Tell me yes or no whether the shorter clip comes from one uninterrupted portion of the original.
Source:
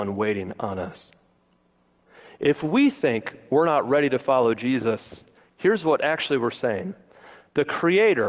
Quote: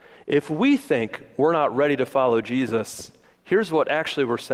yes